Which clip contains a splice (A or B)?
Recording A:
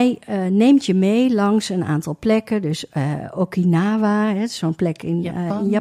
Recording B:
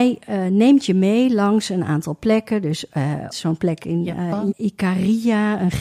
B